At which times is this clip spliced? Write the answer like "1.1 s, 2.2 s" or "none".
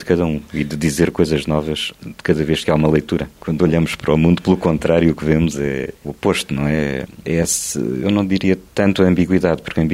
3.4 s, 7.2 s